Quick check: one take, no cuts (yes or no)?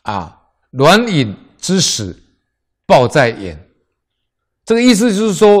yes